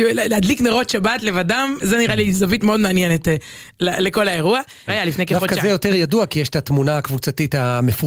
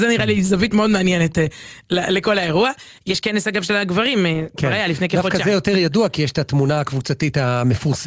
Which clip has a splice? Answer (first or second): first